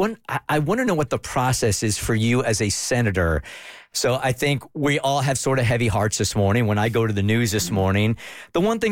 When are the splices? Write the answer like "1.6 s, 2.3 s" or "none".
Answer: 3.9 s